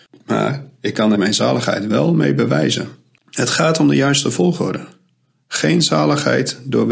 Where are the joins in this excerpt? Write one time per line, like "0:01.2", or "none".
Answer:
0:01.2